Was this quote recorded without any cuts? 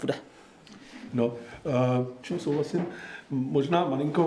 no; 2 cuts; at 1.1 s, 2.2 s

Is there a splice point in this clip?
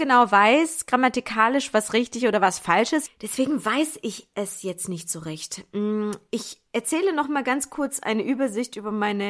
yes; 1 cut; at 3.1 s

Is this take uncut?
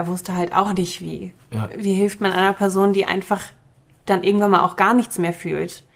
yes; 0 cuts

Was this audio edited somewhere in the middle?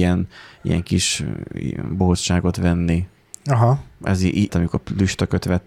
yes; 1 cut; at 4.5 s

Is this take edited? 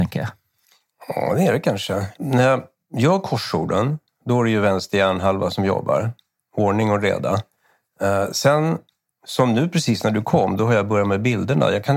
yes; 1 cut; at 2.2 s

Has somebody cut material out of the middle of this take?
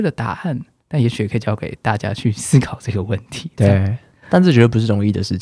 no; 0 cuts

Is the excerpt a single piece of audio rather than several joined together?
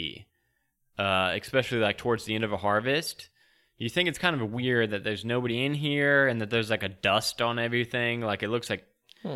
yes; 0 cuts

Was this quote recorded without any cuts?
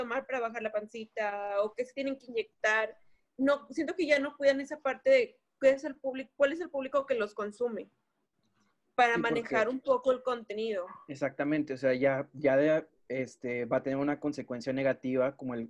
yes; 0 cuts

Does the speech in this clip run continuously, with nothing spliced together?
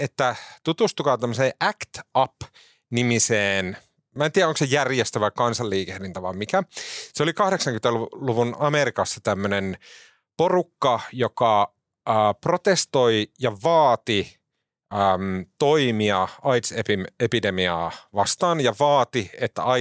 yes; 0 cuts

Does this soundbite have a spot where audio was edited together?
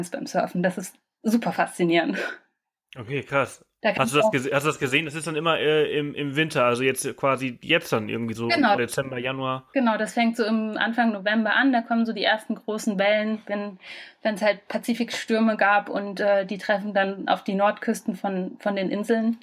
yes; 1 cut; at 8.8 s

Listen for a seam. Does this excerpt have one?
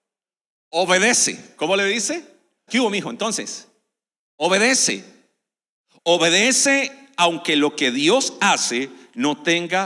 yes; 1 cut; at 2.7 s

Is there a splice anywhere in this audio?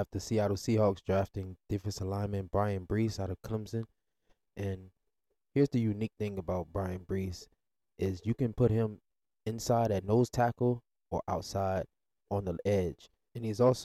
no; 0 cuts

